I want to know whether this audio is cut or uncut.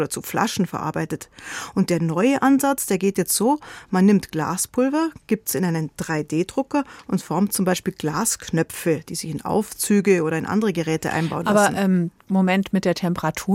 uncut